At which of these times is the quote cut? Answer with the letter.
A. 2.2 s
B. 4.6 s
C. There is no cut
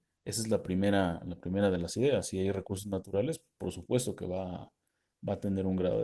C